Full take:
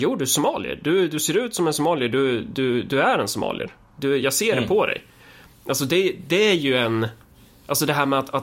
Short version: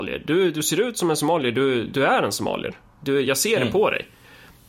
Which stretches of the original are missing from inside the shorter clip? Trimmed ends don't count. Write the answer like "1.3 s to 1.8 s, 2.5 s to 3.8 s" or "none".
2.4 s to 2.8 s